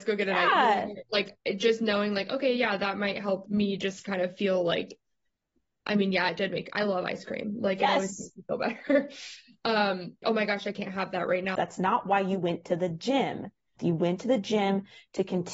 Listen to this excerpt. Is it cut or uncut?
cut